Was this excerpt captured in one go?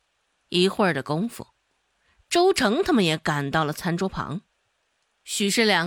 yes; 0 cuts

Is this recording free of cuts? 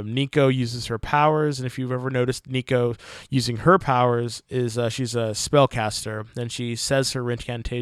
yes; 0 cuts

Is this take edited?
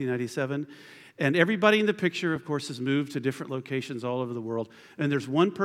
no; 0 cuts

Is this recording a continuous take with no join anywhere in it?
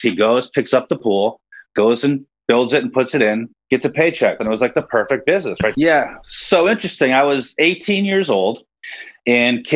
no; 2 cuts; at 4.4 s, 5.7 s

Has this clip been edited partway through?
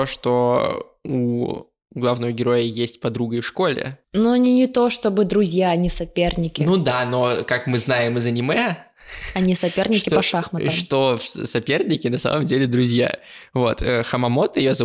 no; 0 cuts

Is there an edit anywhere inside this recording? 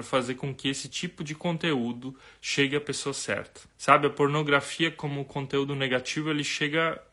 yes; 1 cut; at 3.7 s

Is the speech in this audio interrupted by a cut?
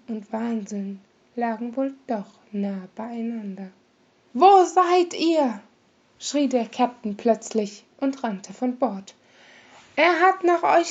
yes; 1 cut; at 4.3 s

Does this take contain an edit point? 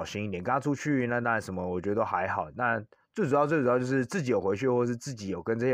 no; 0 cuts

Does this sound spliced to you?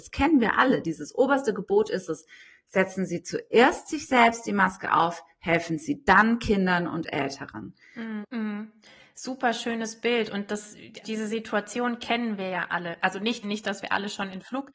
yes; 3 cuts; at 8.2 s, 11.0 s, 13.4 s

